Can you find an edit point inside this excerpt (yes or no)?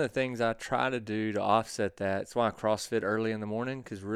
no